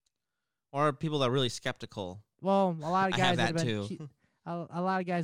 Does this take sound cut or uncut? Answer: cut